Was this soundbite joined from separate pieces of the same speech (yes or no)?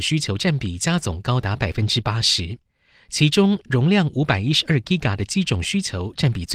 no